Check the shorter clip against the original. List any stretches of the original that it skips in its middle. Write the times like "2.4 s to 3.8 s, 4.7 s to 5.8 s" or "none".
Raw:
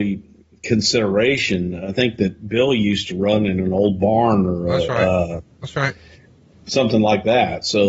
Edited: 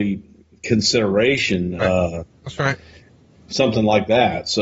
1.8 s to 5.0 s

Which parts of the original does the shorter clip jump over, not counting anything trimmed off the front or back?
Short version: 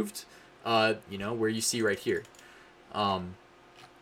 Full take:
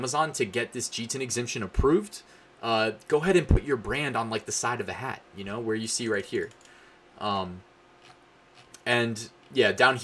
3.0 s to 5.3 s

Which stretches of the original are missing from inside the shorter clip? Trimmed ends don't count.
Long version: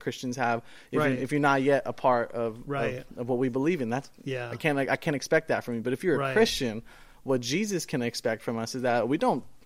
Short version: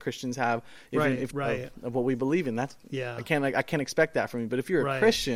1.3 s to 2.6 s

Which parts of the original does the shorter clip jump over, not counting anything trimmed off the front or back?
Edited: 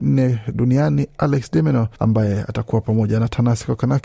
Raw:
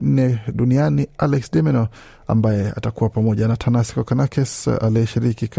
2.0 s to 2.2 s

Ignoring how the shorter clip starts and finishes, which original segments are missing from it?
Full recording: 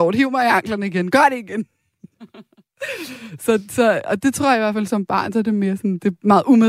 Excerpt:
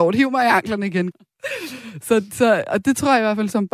1.1 s to 2.5 s

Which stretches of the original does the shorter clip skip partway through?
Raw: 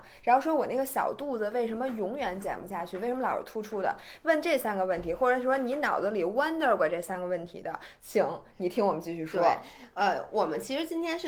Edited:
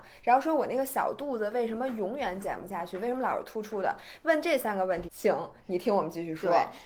5.0 s to 8.0 s

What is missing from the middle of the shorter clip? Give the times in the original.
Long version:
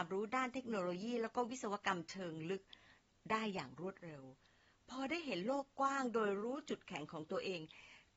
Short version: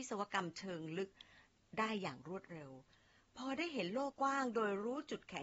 5.6 s to 5.7 s

